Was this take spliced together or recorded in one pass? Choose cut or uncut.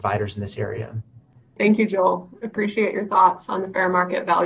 uncut